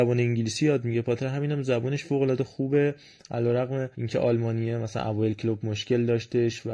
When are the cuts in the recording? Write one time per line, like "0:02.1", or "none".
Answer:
0:03.9